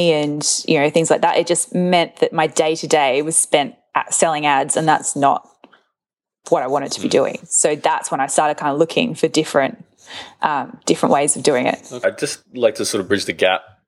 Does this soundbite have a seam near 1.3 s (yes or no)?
no